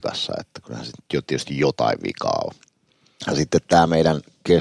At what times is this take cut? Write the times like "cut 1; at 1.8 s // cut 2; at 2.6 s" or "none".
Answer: none